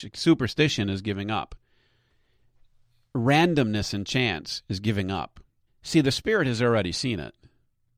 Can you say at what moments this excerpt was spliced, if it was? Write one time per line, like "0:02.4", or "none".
0:05.7